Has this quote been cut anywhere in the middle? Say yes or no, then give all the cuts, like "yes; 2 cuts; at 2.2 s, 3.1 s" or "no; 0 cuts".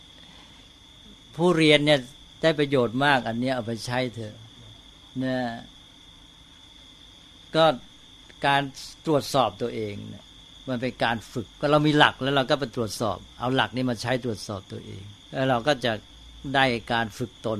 yes; 2 cuts; at 11.5 s, 15.2 s